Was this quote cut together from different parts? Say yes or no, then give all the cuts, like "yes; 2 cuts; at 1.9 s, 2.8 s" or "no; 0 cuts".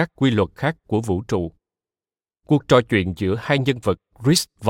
no; 0 cuts